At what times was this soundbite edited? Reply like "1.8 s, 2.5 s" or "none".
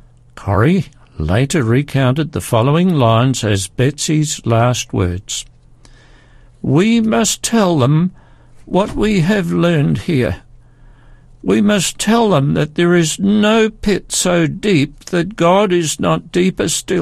none